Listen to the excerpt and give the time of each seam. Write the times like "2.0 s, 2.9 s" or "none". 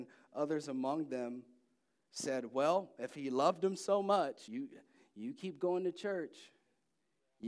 none